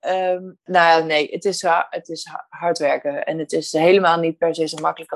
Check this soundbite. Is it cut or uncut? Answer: uncut